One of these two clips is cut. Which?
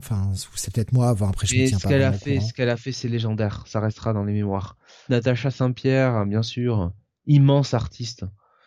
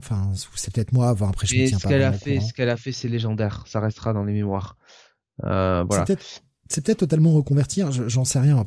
first; 1 cut; at 5.1 s

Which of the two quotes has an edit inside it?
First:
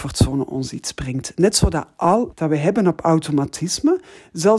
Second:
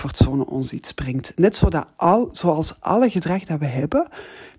first; 1 cut; at 2.3 s

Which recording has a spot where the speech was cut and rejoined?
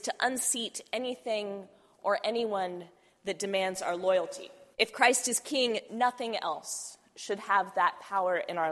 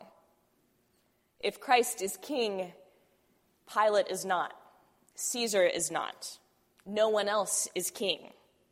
first; 2 cuts; at 4.7 s, 5.9 s

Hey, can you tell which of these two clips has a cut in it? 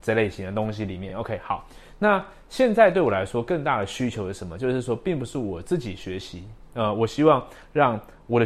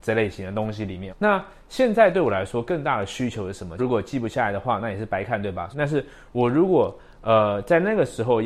second; 3 cuts; at 1.1 s, 3.8 s, 5.7 s

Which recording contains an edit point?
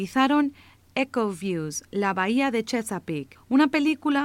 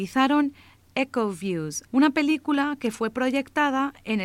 second; 1 cut; at 1.9 s

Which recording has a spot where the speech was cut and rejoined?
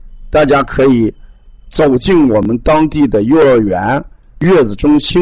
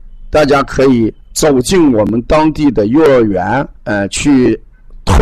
second; 2 cuts; at 1.2 s, 3.8 s

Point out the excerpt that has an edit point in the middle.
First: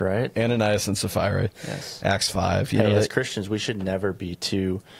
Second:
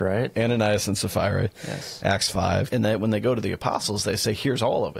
second; 1 cut; at 2.7 s

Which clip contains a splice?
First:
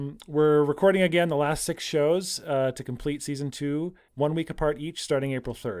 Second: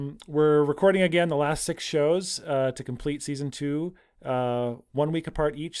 first; 1 cut; at 4.1 s

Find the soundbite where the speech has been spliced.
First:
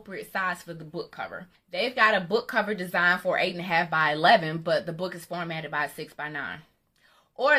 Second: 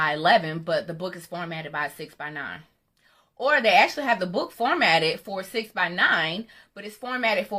first; 1 cut; at 1.5 s

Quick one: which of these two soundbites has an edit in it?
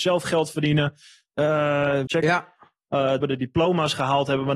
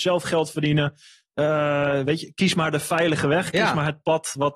first; 2 cuts; at 2.1 s, 3.2 s

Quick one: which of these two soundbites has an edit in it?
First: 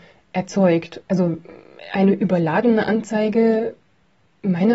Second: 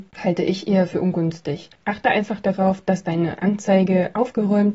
first; 1 cut; at 1.0 s

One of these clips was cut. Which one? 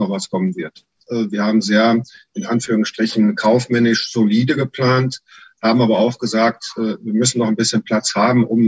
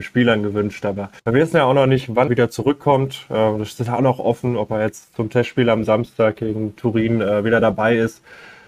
second; 2 cuts; at 1.2 s, 2.3 s

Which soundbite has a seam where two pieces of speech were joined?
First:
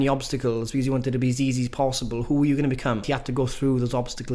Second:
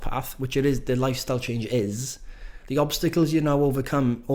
first; 1 cut; at 3.0 s

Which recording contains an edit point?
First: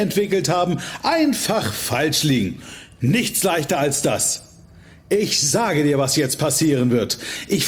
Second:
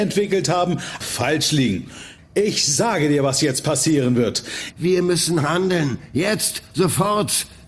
second; 3 cuts; at 1.0 s, 2.2 s, 4.7 s

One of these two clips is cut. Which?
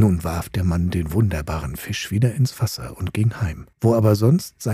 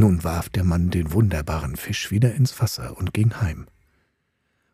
first; 1 cut; at 3.7 s

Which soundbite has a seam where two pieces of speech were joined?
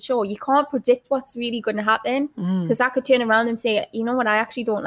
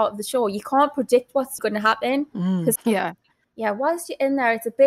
second; 2 cuts; at 1.6 s, 2.8 s

